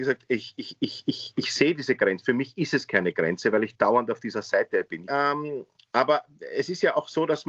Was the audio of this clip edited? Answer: yes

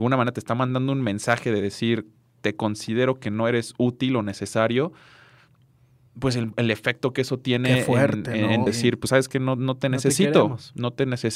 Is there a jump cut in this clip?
yes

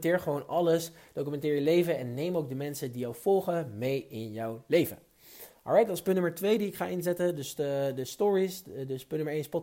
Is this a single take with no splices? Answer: yes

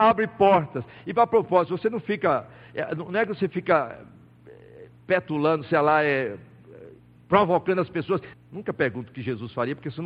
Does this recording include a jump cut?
yes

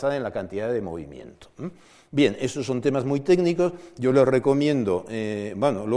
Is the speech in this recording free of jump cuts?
yes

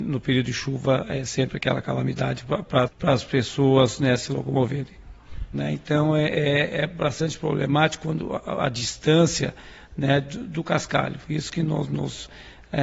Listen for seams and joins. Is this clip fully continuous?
no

